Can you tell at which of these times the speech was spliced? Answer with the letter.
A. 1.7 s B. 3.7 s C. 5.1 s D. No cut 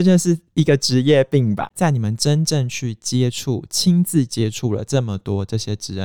A